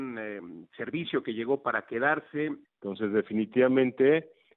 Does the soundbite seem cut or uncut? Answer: cut